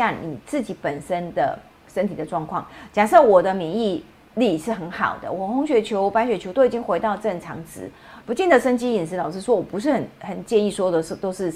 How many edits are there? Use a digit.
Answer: 1